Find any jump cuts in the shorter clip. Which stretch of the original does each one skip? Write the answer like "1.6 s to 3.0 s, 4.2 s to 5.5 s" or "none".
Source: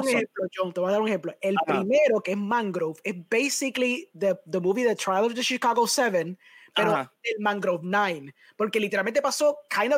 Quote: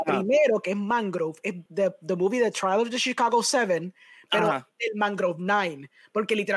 3.3 s to 4.1 s

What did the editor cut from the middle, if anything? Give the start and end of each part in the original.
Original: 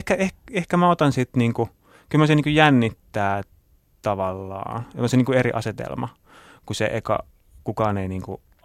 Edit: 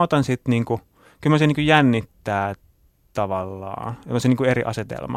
none

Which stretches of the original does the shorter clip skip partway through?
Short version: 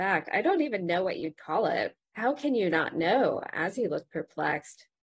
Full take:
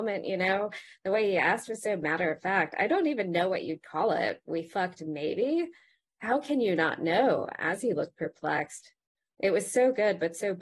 4.4 s to 6.0 s

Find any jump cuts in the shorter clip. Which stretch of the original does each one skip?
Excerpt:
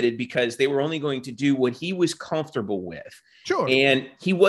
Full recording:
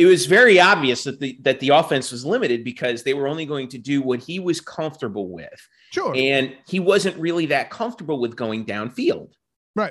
none

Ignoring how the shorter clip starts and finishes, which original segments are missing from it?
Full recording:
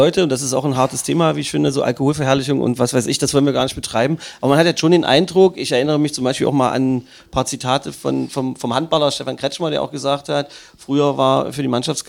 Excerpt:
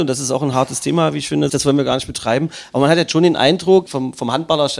1.7 s to 3.2 s, 5.5 s to 8.3 s

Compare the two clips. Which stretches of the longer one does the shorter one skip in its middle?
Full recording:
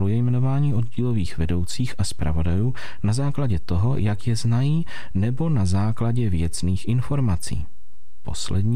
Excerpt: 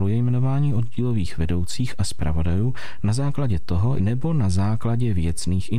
4.0 s to 5.1 s

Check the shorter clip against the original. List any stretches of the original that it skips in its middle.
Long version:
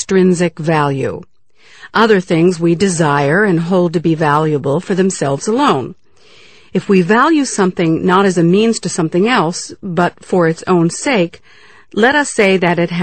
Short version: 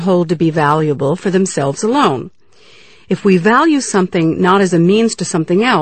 none

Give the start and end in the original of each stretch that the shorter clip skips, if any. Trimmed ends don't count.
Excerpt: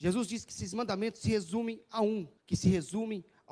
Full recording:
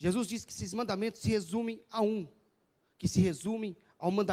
2.4 s to 2.9 s

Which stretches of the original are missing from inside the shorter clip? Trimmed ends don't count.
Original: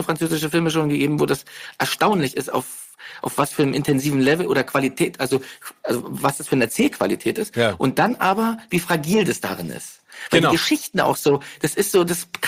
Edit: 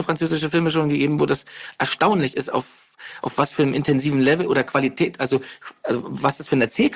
none

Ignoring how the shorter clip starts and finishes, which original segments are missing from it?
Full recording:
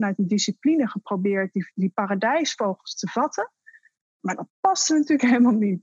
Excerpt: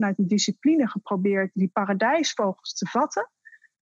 1.5 s to 1.7 s

